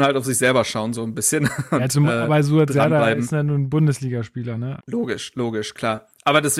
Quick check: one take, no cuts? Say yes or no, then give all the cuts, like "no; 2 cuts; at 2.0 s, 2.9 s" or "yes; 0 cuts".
no; 1 cut; at 4.8 s